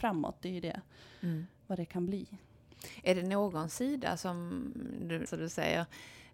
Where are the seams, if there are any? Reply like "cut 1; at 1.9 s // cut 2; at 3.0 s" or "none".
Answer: cut 1; at 5.3 s